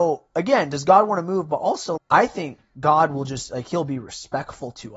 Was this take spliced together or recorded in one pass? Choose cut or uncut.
cut